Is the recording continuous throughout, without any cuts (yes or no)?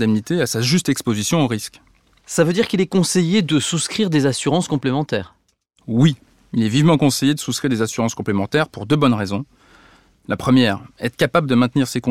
no